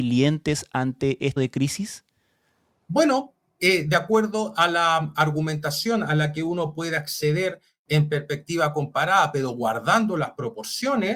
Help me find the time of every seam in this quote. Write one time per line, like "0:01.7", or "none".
0:01.4

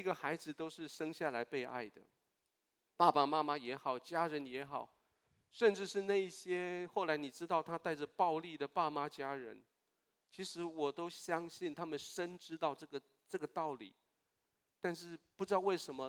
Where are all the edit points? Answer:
none

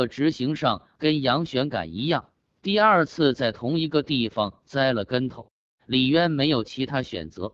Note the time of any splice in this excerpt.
0:05.8

